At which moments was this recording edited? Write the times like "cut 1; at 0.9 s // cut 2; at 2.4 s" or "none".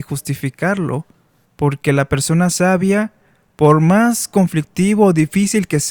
none